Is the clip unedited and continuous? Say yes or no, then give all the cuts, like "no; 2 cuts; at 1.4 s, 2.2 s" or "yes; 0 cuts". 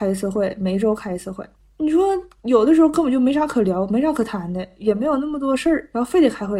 yes; 0 cuts